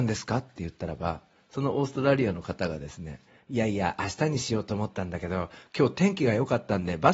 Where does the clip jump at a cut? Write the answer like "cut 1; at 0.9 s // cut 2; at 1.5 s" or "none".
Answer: none